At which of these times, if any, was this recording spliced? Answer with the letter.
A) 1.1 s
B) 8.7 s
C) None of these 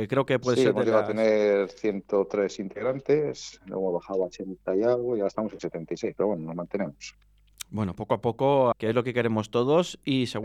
B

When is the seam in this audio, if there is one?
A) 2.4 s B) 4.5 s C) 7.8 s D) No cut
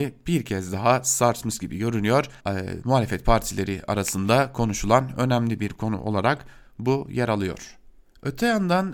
A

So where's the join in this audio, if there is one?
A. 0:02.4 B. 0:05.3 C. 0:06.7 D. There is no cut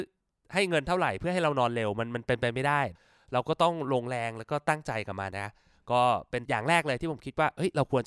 B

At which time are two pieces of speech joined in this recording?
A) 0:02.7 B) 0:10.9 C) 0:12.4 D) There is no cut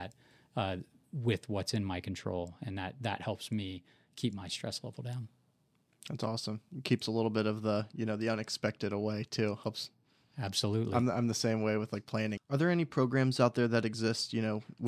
C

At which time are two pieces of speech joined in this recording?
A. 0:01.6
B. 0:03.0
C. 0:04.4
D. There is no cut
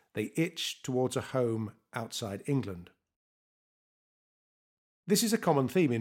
D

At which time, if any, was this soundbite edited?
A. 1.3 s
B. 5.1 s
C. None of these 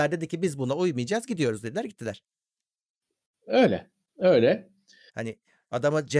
B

